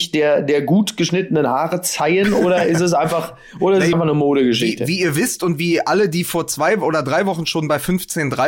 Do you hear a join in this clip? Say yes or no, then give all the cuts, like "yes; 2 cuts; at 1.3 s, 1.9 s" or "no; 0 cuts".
yes; 1 cut; at 3.9 s